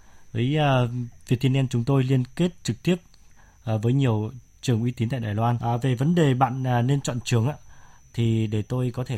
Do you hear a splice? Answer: yes; 1 cut; at 5.6 s

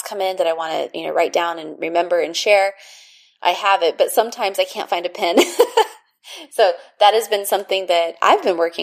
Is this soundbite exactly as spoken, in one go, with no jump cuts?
yes; 0 cuts

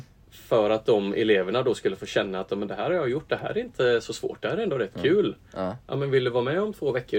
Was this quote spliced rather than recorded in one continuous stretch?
no; 0 cuts

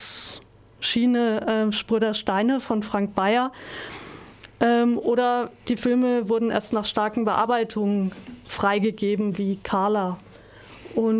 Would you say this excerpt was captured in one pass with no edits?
yes; 0 cuts

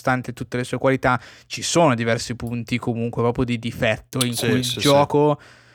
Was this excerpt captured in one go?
yes; 0 cuts

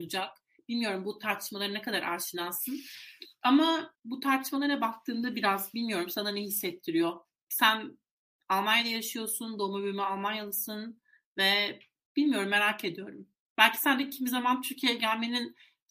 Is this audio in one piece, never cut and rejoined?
yes; 0 cuts

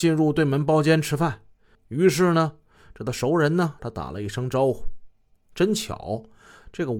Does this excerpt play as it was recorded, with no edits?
no; 3 cuts; at 1.8 s, 3.8 s, 5.4 s

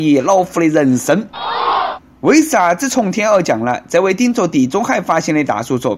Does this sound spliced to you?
no; 0 cuts

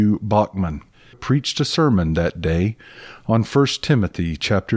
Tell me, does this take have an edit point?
yes; 1 cut; at 1.1 s

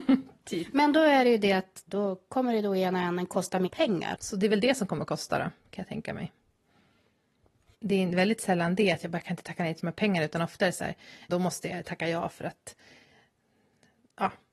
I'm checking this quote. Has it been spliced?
yes; 3 cuts; at 4.1 s, 7.7 s, 11.3 s

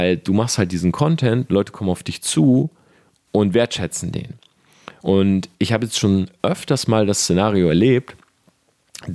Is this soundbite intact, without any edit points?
yes; 0 cuts

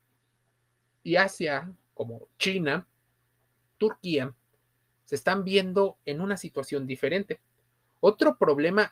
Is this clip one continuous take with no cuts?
yes; 0 cuts

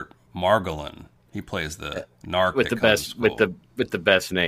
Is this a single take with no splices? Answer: yes; 0 cuts

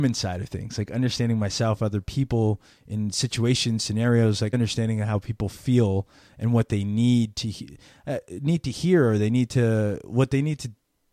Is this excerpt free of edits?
no; 1 cut; at 4.5 s

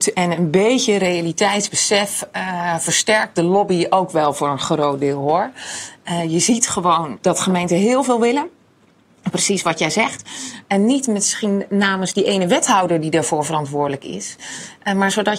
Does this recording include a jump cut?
yes; 1 cut; at 10.6 s

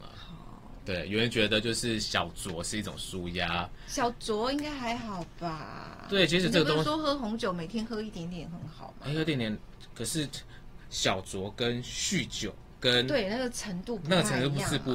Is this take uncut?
yes; 0 cuts

